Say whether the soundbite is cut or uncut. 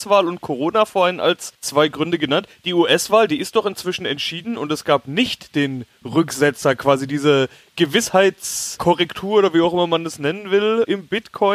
uncut